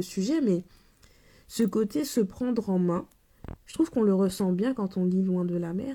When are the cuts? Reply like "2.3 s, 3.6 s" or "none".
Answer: none